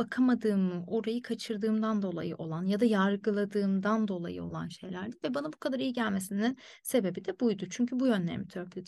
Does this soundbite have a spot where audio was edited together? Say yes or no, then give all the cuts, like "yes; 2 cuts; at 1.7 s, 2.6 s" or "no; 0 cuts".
no; 0 cuts